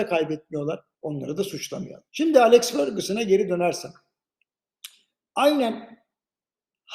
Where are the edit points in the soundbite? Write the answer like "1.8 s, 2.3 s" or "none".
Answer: 0.9 s, 2.1 s